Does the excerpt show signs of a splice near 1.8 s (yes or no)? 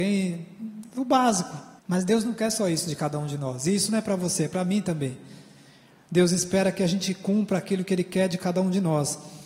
yes